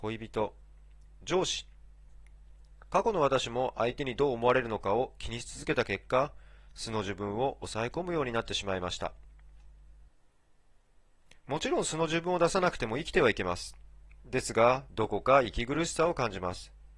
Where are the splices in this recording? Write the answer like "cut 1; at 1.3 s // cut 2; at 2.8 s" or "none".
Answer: cut 1; at 11.4 s // cut 2; at 14.9 s